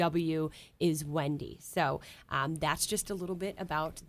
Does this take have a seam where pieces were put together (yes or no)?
no